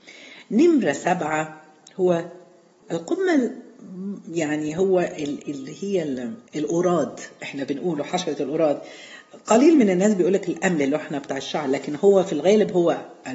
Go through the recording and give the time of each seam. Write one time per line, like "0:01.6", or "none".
0:02.8
0:06.5